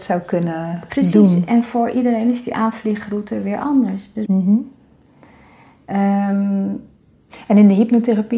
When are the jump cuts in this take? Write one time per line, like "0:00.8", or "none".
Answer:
0:04.2

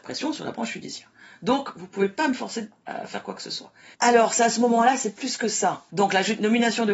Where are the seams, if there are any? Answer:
0:03.9
0:05.9

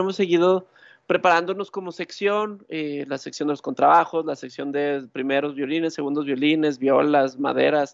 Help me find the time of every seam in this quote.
none

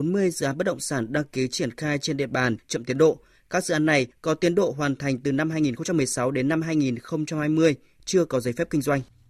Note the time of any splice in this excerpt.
0:02.6
0:08.0

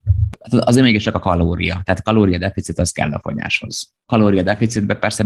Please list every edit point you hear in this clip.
none

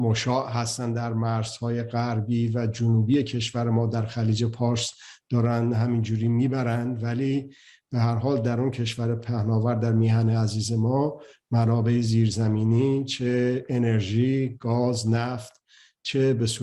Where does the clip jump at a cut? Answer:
none

